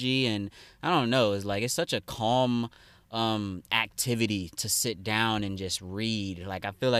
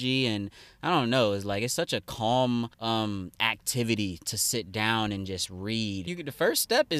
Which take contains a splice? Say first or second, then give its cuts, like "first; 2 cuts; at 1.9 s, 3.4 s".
second; 2 cuts; at 2.7 s, 6.1 s